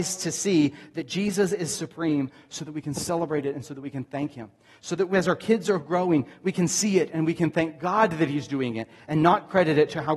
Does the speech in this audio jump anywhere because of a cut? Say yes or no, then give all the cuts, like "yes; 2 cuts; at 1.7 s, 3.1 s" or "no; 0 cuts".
no; 0 cuts